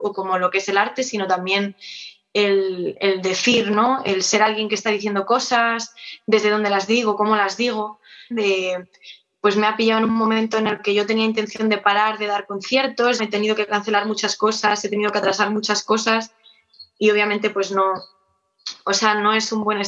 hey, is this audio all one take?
no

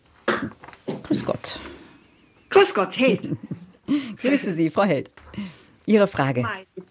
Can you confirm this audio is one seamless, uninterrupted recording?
yes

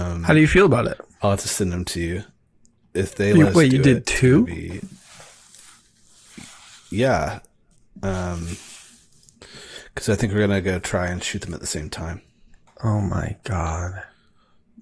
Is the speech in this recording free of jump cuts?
yes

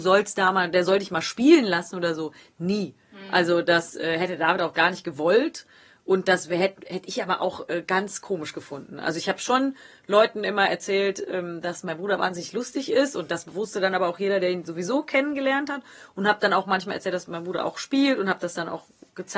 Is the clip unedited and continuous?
yes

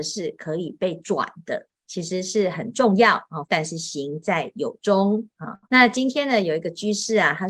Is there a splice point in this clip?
yes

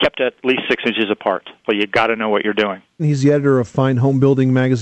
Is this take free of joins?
no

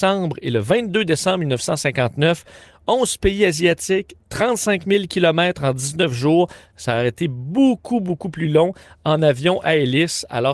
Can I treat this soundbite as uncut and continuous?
yes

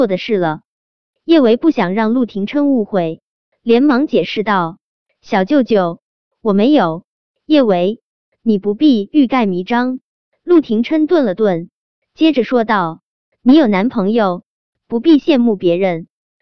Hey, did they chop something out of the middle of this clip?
no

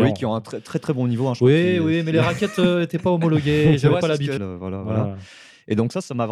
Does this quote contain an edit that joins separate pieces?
yes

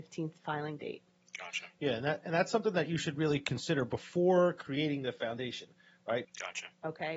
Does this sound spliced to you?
yes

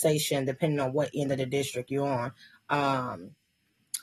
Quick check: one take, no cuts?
no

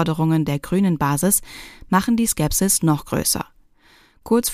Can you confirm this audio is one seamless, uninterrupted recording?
yes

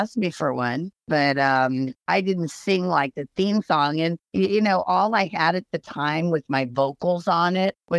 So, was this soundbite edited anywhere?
no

